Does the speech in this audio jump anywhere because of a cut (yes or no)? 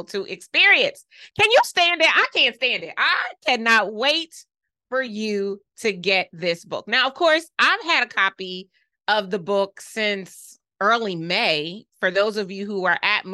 no